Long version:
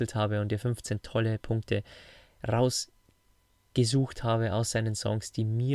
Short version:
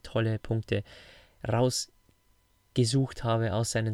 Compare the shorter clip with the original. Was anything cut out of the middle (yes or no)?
no